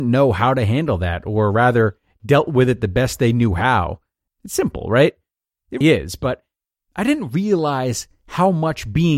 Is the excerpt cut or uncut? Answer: cut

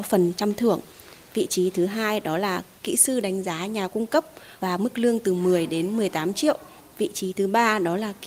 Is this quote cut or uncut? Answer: uncut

